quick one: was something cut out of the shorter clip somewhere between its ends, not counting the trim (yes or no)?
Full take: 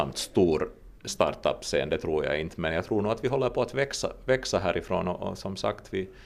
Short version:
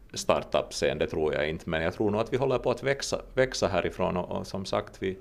no